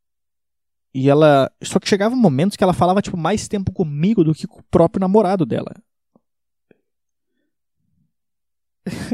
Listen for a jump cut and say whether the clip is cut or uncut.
uncut